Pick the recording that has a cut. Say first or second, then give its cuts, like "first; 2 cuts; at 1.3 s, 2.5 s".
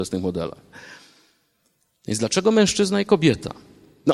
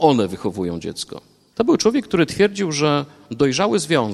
second; 1 cut; at 1.5 s